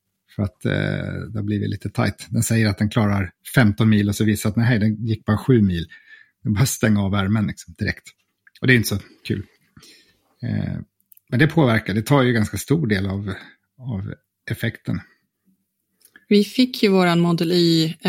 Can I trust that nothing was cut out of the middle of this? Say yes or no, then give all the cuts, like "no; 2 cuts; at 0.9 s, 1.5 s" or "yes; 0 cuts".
yes; 0 cuts